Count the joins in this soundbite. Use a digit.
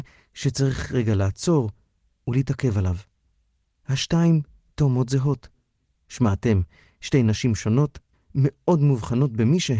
1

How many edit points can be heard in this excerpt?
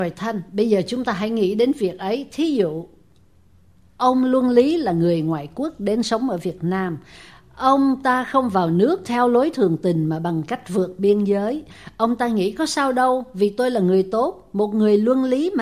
0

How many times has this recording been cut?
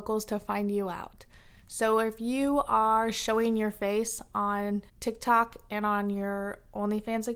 1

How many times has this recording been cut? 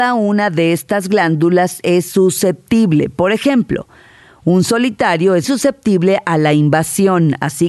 1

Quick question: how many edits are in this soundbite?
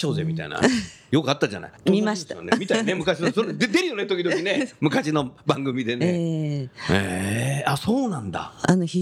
1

